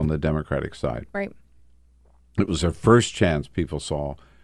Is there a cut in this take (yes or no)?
no